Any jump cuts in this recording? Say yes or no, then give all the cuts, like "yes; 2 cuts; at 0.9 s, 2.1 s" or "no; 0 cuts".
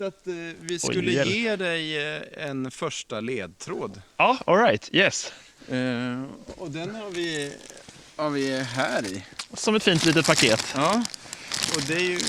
no; 0 cuts